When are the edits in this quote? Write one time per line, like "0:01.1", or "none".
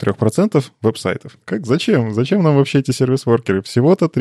0:01.4